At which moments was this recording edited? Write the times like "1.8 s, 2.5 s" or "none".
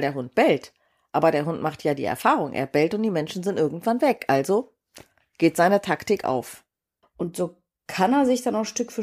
7.0 s